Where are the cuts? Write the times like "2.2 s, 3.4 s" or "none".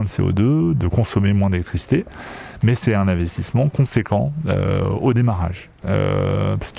5.8 s

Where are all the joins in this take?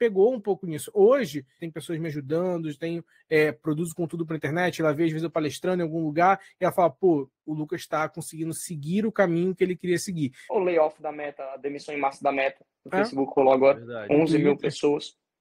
1.6 s, 10.5 s

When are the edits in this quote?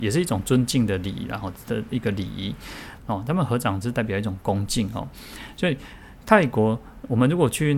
3.0 s

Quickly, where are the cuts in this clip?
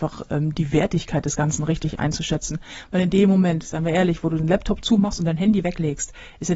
none

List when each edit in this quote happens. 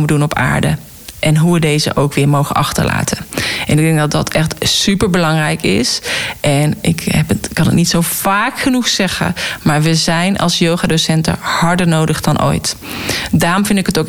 none

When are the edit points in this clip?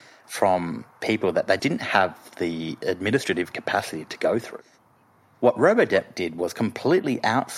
1.6 s

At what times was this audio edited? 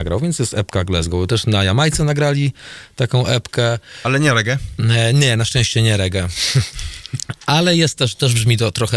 none

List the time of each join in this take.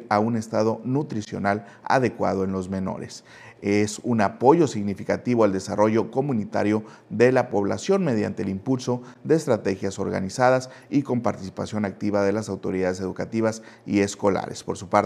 none

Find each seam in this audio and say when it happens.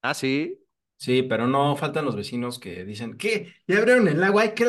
none

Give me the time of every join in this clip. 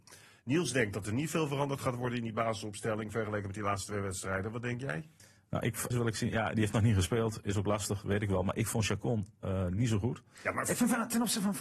5.9 s, 10.4 s

